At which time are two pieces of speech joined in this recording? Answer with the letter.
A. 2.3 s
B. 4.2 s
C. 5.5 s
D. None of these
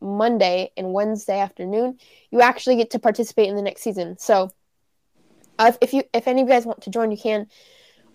D